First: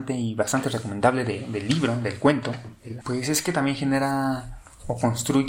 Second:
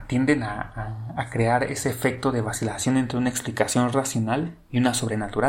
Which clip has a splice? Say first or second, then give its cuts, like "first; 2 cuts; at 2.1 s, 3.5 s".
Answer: first; 1 cut; at 3.0 s